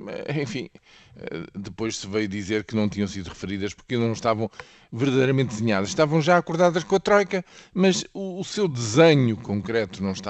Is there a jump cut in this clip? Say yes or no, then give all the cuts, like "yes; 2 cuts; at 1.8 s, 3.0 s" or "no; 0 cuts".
no; 0 cuts